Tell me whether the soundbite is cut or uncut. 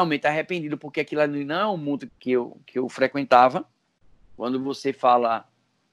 cut